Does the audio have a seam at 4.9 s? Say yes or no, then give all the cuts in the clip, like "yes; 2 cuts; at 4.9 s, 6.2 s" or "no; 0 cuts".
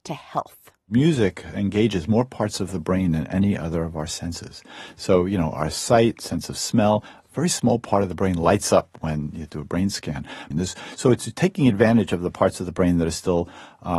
no; 1 cut; at 10.5 s